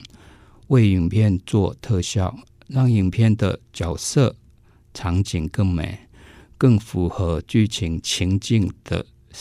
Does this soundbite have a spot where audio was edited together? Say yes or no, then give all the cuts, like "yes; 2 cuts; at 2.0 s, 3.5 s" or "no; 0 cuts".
no; 0 cuts